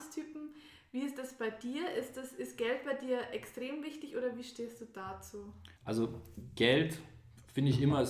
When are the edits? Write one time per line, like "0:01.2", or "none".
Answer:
0:05.8